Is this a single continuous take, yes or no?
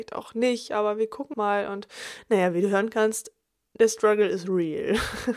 no